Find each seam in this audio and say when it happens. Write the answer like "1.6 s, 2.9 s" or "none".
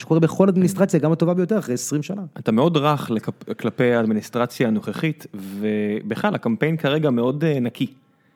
none